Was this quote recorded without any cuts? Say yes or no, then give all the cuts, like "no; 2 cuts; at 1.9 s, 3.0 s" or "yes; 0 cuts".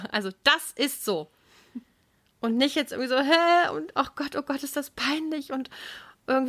yes; 0 cuts